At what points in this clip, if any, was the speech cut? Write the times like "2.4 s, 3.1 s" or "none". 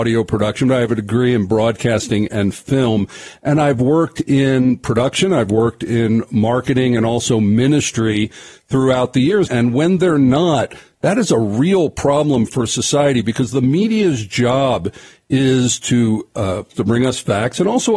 9.5 s, 16.7 s